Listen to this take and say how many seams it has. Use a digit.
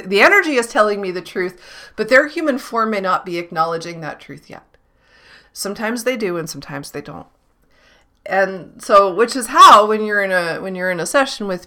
1